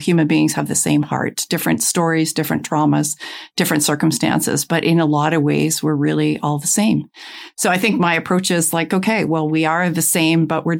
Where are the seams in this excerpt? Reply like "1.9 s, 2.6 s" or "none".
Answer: none